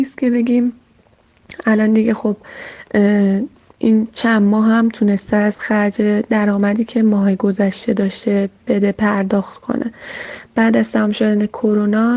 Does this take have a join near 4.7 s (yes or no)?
no